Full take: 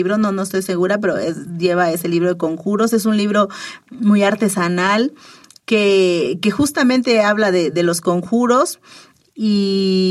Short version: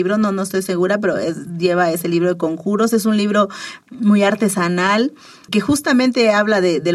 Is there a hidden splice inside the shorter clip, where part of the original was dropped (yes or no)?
yes